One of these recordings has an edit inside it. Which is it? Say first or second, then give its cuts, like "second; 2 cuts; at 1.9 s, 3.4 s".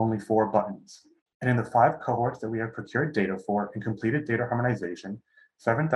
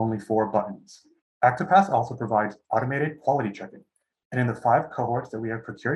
first; 1 cut; at 1.3 s